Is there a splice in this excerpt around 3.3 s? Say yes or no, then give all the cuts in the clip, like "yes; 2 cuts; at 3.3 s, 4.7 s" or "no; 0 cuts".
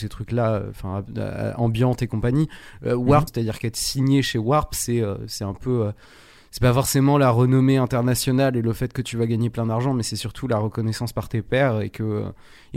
yes; 1 cut; at 3.3 s